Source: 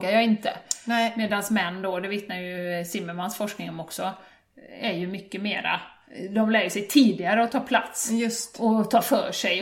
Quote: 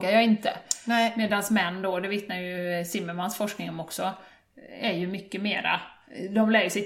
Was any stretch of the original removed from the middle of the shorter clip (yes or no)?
no